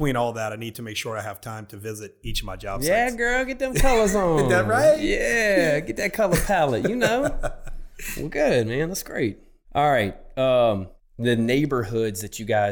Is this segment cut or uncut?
uncut